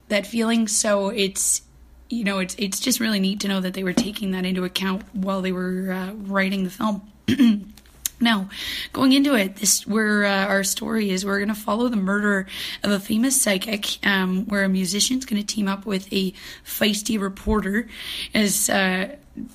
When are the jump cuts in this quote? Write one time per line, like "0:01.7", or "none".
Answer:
none

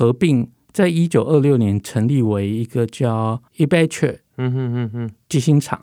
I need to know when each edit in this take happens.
0:03.5

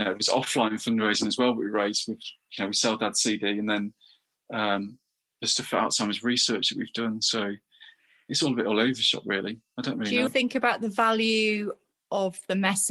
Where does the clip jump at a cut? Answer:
0:10.3

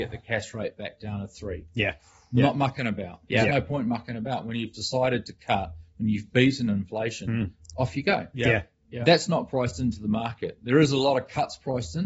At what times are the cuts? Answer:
none

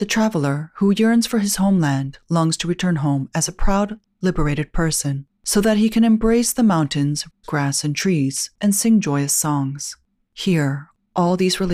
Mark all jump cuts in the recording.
0:07.4
0:08.5
0:10.1

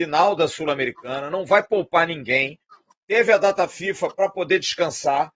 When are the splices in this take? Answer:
none

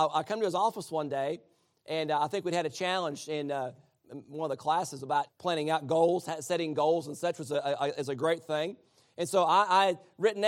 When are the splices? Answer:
0:05.3

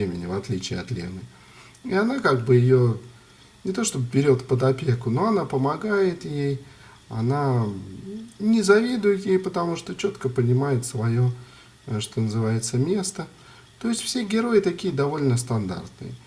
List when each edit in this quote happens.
none

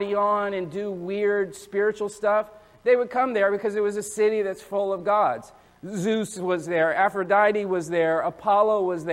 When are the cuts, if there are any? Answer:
none

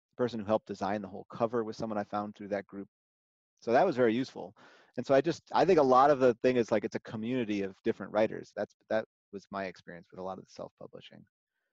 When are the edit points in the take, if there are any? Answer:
0:08.5

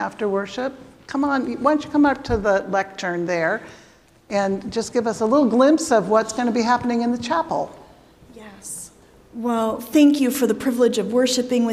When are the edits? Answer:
none

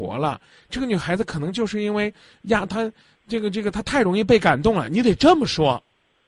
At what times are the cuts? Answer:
none

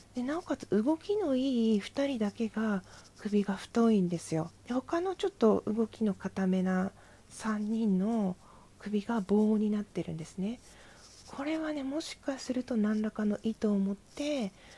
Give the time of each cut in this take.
0:04.6

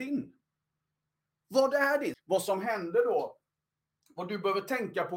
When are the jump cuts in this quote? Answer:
0:02.1

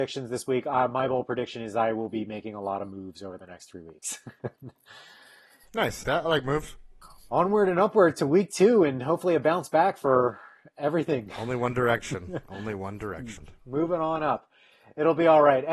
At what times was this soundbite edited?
0:06.0
0:13.4

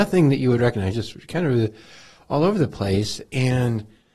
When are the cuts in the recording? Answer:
none

